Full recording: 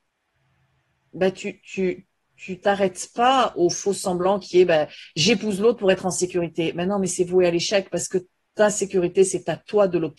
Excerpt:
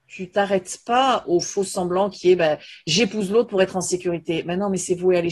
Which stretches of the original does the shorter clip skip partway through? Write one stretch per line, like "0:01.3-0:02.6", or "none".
none